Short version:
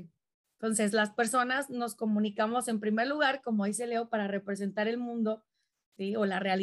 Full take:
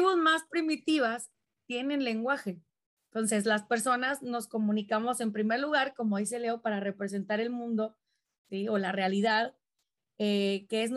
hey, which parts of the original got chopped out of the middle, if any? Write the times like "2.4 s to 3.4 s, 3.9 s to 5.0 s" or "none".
none